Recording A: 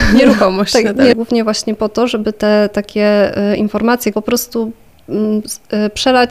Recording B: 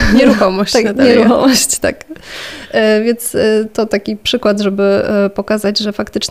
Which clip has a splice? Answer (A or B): A